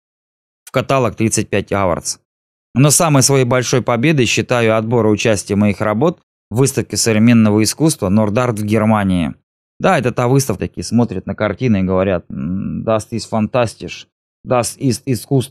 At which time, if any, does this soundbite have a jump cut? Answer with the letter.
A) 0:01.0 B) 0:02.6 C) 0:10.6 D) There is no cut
C